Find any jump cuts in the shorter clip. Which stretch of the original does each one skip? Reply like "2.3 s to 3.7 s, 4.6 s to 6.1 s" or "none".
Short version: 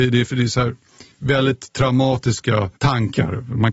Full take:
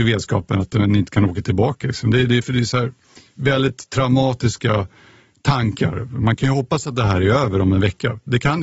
4.9 s to 5.4 s